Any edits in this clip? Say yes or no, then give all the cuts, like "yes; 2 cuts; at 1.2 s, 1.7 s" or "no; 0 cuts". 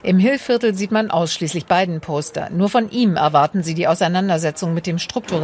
no; 0 cuts